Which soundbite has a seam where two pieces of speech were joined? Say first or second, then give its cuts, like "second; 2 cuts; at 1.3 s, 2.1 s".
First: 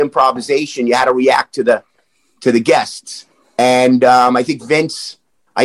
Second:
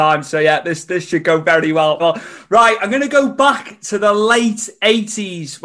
second; 1 cut; at 2.0 s